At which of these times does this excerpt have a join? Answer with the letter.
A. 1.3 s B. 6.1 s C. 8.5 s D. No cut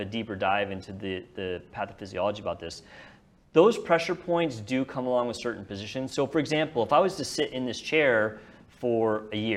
D